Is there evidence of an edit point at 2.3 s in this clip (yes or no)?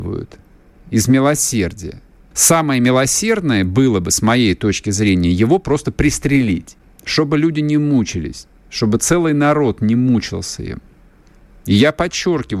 yes